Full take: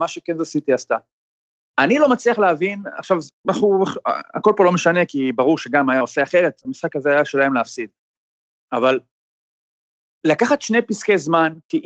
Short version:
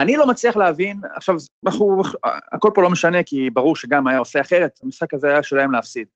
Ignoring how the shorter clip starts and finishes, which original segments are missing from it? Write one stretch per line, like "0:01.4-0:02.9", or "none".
none